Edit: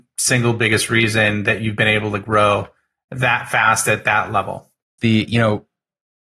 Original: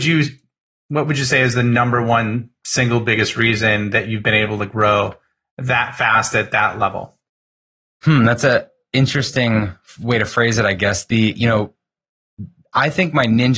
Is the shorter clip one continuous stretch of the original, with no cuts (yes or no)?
no